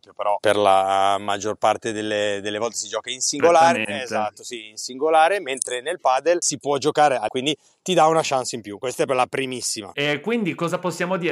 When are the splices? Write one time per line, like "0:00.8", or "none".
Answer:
0:07.3
0:09.1